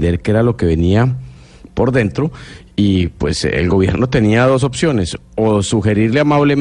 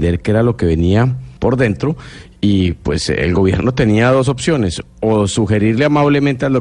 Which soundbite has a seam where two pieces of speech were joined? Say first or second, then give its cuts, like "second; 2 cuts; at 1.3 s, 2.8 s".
second; 1 cut; at 1.4 s